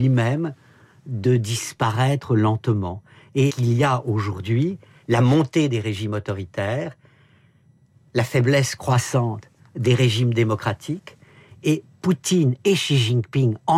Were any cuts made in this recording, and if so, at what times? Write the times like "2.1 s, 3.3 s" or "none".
3.5 s